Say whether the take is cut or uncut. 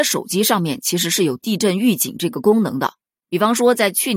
uncut